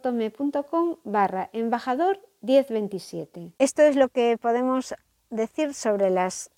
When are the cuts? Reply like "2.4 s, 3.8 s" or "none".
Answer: 3.6 s